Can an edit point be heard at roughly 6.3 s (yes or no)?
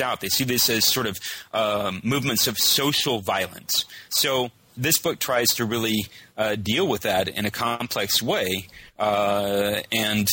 no